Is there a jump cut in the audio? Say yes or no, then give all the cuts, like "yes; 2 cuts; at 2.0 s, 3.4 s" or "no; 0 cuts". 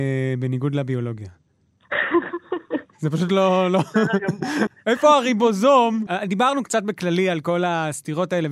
yes; 2 cuts; at 4.7 s, 6.1 s